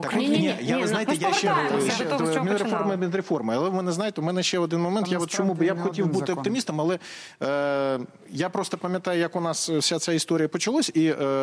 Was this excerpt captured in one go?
yes; 0 cuts

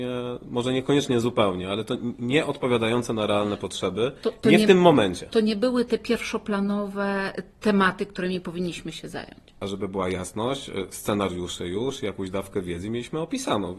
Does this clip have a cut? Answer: no; 0 cuts

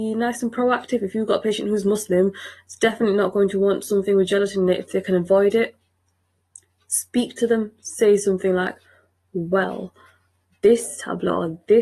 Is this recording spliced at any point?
no; 0 cuts

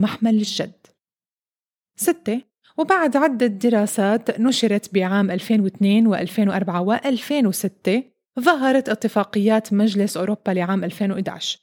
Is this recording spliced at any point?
yes; 1 cut; at 1.8 s

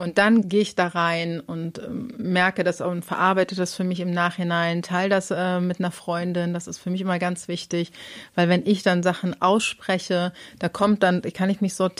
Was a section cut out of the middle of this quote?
no; 0 cuts

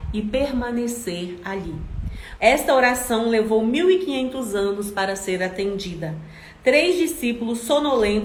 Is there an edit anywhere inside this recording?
yes; 1 cut; at 2.4 s

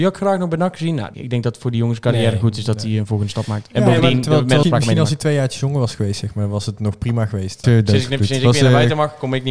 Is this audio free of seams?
no; 3 cuts; at 1.1 s, 4.6 s, 7.6 s

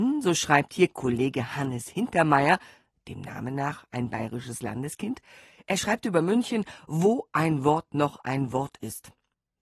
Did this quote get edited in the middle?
no; 0 cuts

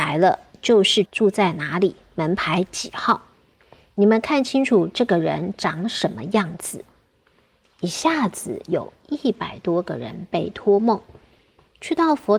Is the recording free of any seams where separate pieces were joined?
no; 1 cut; at 1.0 s

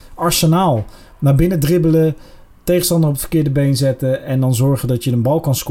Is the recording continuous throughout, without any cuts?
yes; 0 cuts

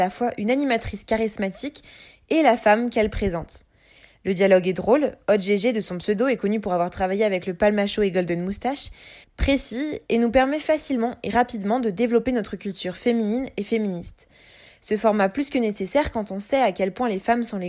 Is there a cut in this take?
yes; 1 cut; at 9.2 s

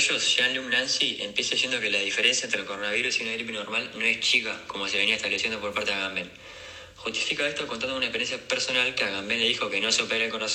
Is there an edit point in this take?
no; 0 cuts

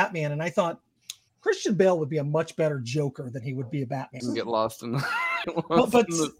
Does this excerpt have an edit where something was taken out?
yes; 2 cuts; at 4.2 s, 5.4 s

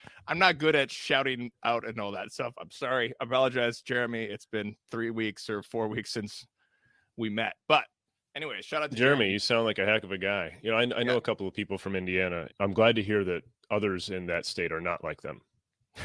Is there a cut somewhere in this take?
yes; 1 cut; at 12.5 s

